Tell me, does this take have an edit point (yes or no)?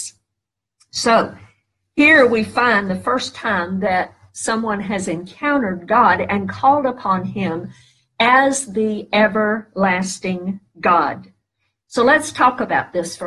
no